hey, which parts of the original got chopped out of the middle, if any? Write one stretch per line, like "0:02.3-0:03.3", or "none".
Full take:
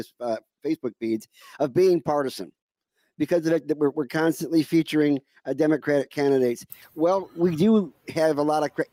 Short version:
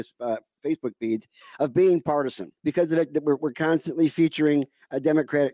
0:02.6-0:03.1